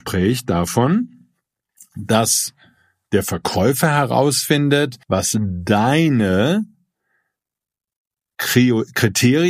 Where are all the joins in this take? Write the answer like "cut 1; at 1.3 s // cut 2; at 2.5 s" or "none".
cut 1; at 5.0 s